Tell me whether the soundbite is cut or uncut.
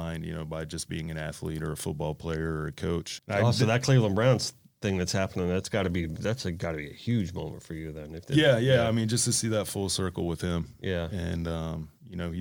cut